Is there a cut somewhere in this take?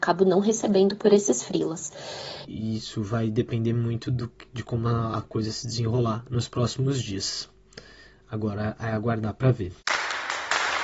yes; 1 cut; at 2.4 s

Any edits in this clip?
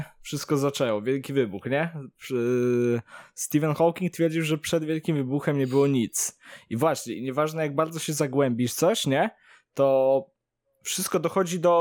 no; 0 cuts

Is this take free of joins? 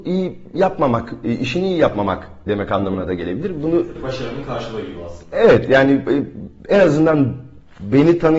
yes; 0 cuts

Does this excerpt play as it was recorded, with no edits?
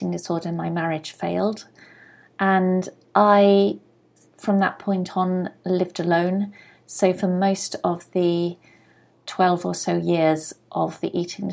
yes; 0 cuts

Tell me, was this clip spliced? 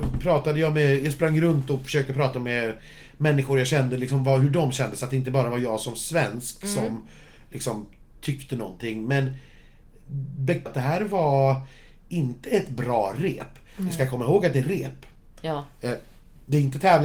yes; 1 cut; at 10.7 s

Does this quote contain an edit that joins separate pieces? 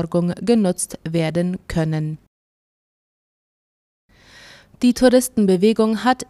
no; 0 cuts

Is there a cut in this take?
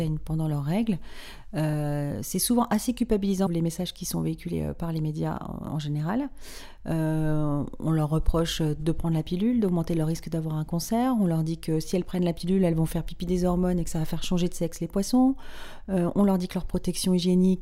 yes; 1 cut; at 3.5 s

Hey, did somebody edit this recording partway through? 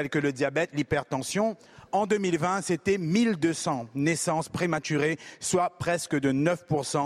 no; 0 cuts

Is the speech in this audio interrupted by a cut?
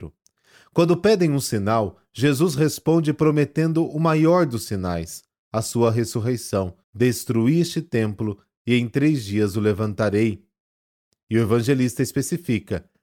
yes; 1 cut; at 6.8 s

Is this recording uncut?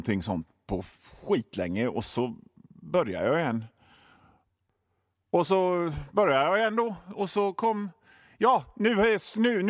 yes; 0 cuts

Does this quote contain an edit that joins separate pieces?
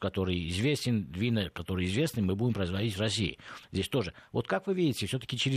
no; 0 cuts

